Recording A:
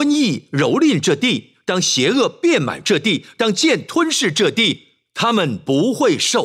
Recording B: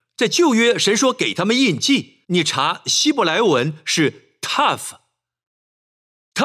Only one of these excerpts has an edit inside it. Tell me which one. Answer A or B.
B